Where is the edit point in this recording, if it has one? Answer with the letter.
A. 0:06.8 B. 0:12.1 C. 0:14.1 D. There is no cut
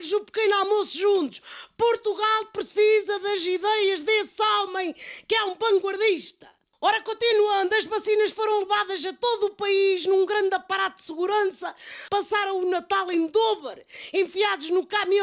B